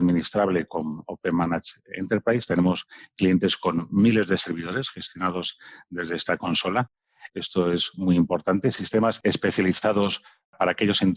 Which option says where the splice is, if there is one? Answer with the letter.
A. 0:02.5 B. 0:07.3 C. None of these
B